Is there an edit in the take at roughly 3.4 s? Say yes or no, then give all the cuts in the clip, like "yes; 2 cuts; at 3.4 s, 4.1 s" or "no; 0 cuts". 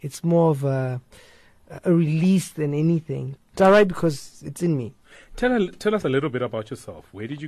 yes; 1 cut; at 3.4 s